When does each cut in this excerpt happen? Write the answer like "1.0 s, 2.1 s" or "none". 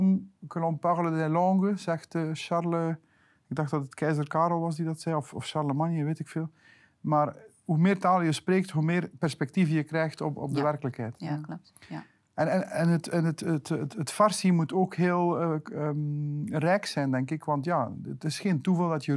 none